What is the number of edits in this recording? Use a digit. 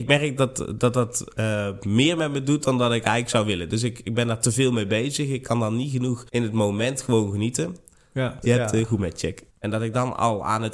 3